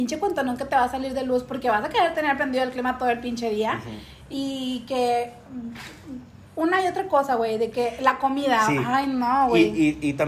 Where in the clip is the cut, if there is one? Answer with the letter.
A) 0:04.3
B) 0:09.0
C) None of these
A